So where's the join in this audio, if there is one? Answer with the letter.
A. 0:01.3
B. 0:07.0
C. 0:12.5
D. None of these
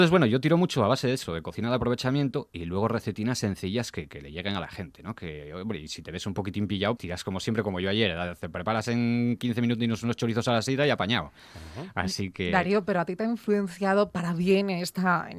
B